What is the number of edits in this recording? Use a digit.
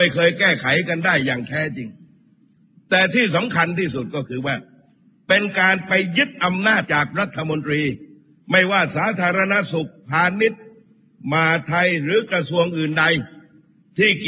1